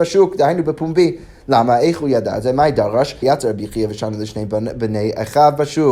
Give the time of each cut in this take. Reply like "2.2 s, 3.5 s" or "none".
3.2 s